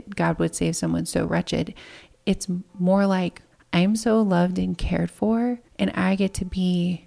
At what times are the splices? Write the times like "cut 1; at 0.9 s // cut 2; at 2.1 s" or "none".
cut 1; at 3.5 s // cut 2; at 5.7 s